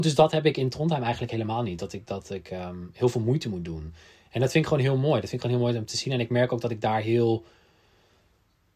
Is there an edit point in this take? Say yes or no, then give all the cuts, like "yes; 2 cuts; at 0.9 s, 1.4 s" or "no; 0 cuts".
no; 0 cuts